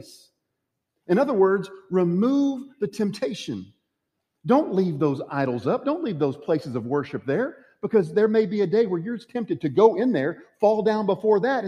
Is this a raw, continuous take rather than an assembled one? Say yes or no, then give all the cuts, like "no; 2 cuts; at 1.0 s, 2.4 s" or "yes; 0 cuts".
yes; 0 cuts